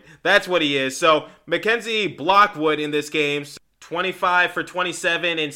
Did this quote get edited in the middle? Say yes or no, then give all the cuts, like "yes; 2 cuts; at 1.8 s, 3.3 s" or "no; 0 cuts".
no; 0 cuts